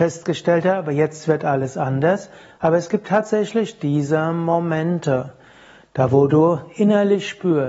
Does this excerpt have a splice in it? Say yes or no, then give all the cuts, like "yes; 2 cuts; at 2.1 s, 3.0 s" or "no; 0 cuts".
no; 0 cuts